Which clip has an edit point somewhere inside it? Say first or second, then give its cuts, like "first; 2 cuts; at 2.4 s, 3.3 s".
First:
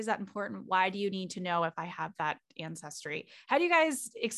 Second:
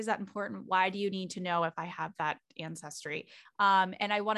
second; 1 cut; at 3.4 s